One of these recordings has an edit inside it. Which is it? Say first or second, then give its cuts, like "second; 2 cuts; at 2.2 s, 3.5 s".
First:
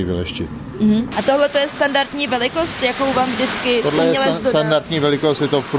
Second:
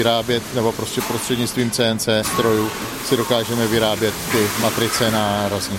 first; 1 cut; at 1.1 s